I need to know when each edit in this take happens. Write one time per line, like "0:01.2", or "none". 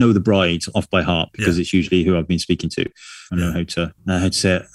0:03.3